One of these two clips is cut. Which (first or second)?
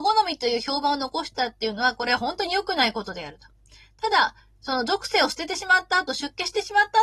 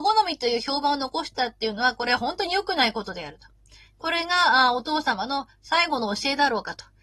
second